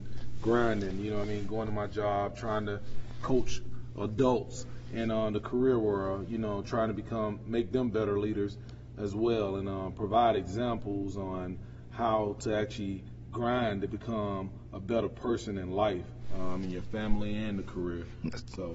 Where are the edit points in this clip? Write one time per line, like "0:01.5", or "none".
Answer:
none